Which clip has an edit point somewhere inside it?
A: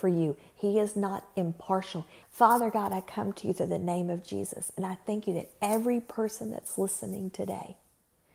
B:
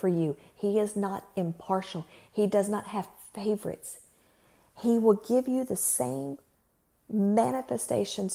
A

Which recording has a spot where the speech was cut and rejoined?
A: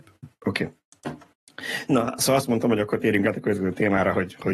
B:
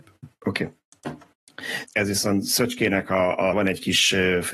B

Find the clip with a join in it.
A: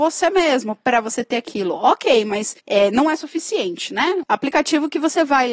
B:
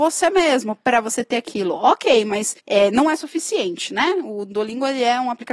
A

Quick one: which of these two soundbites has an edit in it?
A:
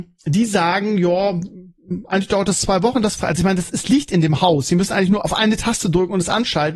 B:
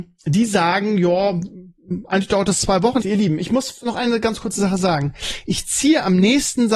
B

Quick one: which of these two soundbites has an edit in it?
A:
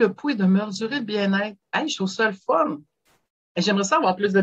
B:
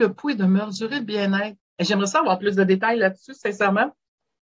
B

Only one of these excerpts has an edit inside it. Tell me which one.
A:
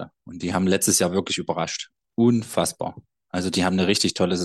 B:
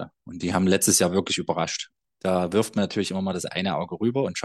B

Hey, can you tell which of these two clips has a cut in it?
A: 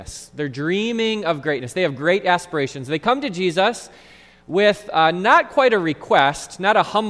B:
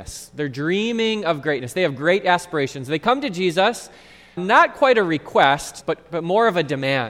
B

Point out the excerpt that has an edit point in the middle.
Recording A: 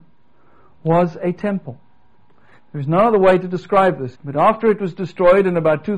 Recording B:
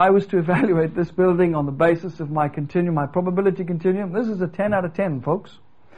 A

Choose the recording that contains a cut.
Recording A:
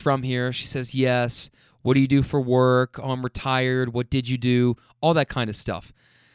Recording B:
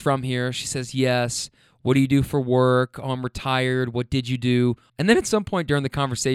B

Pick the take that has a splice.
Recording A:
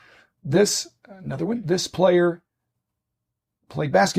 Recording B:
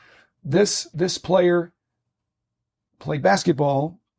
B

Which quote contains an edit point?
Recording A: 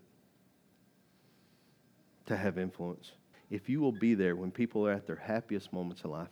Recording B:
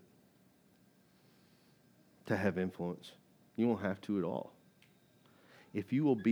A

